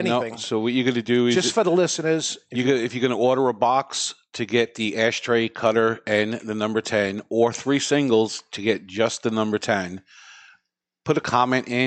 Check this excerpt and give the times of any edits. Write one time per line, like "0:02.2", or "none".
none